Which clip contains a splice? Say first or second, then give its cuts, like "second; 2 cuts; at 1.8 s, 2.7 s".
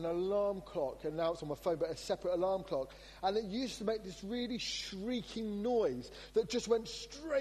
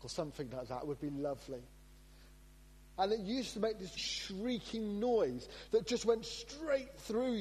second; 2 cuts; at 3.0 s, 4.0 s